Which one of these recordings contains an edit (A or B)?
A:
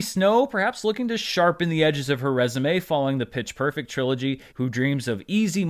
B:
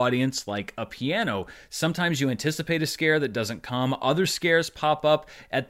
A